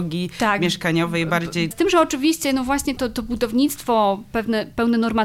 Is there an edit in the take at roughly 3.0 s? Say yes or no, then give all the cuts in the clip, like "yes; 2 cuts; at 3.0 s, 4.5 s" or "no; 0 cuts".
yes; 2 cuts; at 1.7 s, 3.0 s